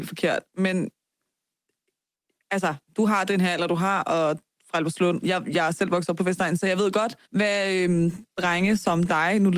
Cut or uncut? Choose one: cut